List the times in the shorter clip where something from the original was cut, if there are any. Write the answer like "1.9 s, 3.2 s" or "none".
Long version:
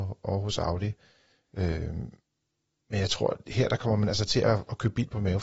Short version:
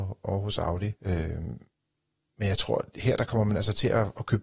1.0 s